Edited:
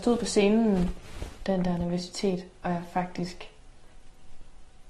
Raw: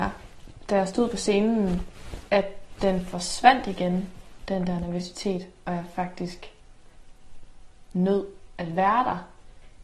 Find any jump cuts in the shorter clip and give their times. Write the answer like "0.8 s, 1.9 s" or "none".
1.4 s